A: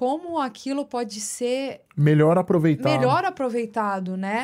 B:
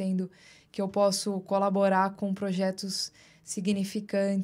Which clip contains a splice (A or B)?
A